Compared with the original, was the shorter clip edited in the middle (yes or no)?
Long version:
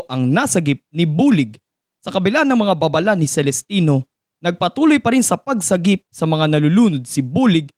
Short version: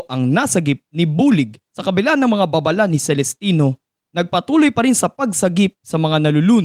yes